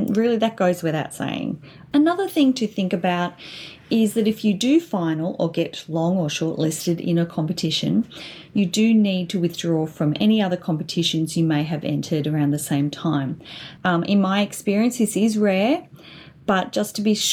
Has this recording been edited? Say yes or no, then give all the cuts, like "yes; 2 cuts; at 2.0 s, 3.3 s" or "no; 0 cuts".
yes; 2 cuts; at 1.9 s, 13.8 s